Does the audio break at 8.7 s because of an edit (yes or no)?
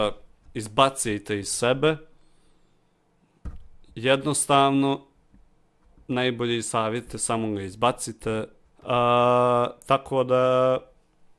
yes